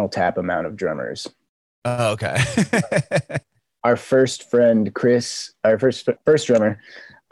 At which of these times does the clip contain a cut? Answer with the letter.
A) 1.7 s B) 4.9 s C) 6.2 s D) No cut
C